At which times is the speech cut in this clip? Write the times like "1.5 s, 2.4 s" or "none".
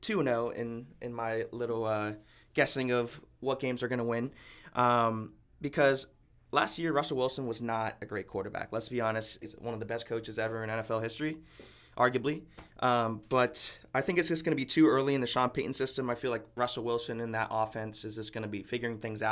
9.4 s